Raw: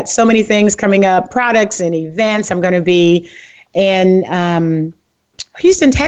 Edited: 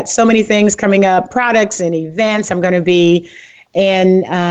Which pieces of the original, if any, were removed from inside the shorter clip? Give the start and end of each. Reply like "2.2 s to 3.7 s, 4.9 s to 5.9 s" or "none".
none

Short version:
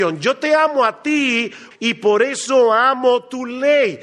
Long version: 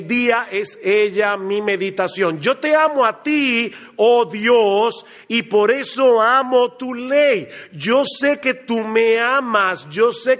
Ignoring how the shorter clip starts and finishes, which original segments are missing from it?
3.9 s to 5.2 s

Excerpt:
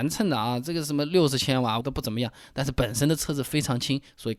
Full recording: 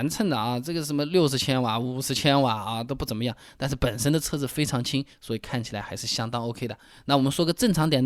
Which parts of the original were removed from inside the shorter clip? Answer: 1.8 s to 2.8 s

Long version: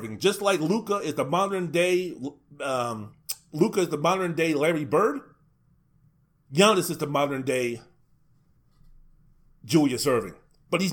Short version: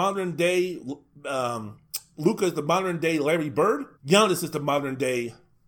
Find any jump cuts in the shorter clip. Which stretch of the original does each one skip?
5.3 s to 6.4 s

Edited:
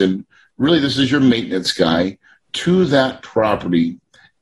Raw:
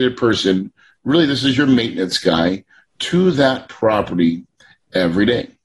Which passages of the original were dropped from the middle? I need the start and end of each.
none

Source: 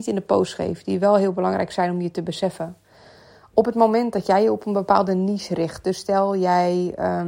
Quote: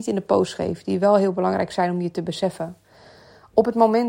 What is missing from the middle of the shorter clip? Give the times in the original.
none

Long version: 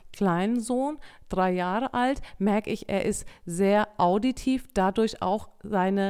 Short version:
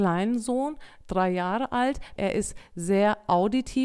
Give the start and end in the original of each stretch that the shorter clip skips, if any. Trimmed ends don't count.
2.4 s to 2.9 s

